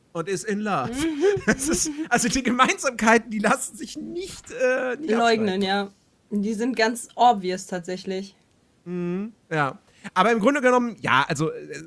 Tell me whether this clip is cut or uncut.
uncut